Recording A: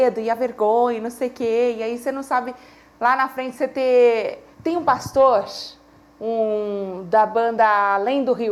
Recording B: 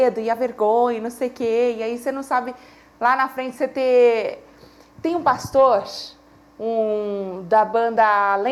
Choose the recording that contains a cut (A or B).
A